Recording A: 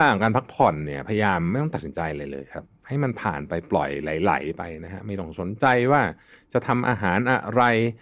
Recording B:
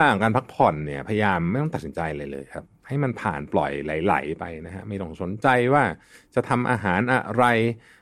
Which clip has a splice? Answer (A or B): B